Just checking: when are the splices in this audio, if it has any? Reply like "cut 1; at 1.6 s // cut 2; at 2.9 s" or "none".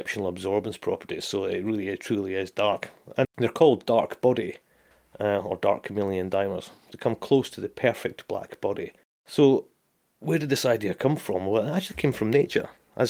cut 1; at 3.2 s